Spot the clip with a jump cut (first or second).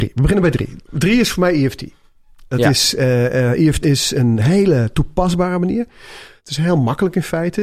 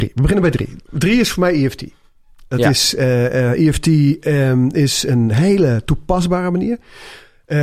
first